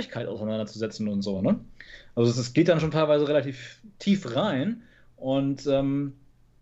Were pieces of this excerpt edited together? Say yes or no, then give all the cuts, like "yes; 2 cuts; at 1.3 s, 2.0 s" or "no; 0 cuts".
no; 0 cuts